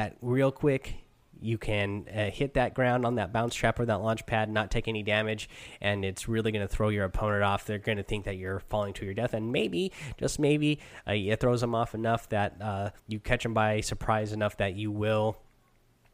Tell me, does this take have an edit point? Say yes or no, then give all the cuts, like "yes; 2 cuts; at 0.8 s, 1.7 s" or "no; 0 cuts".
yes; 1 cut; at 13.0 s